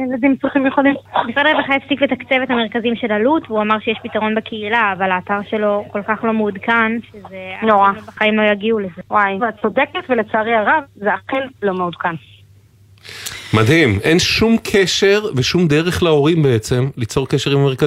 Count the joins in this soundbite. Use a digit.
1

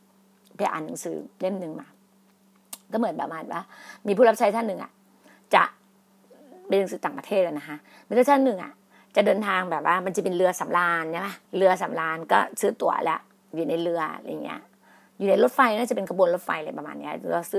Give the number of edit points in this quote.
1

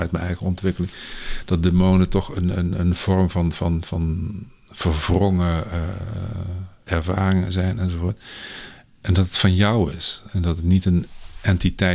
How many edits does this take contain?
1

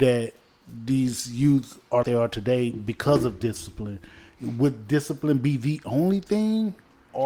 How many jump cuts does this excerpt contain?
1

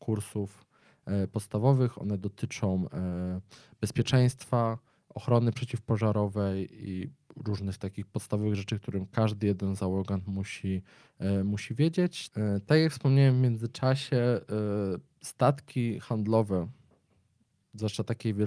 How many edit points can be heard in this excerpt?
1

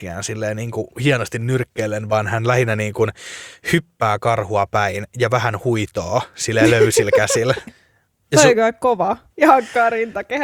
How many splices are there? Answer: 2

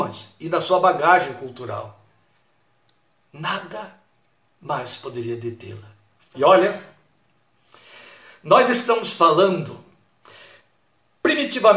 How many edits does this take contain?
1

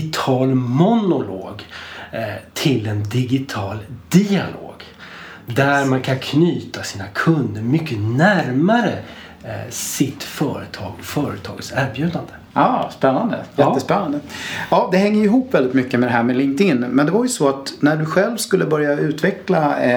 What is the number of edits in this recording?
0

